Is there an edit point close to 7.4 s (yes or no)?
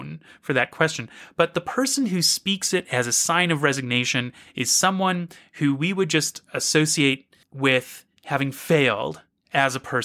yes